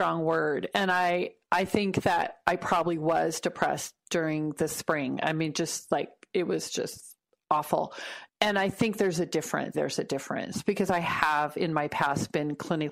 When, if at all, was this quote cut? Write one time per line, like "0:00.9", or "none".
0:08.3
0:09.7